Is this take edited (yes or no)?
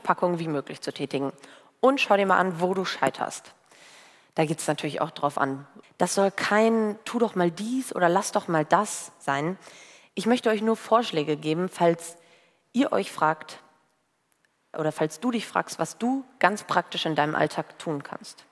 yes